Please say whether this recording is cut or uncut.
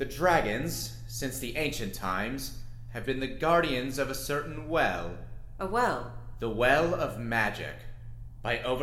uncut